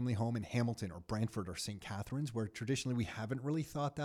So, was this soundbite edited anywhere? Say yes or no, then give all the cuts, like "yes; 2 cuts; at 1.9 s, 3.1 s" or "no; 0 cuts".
no; 0 cuts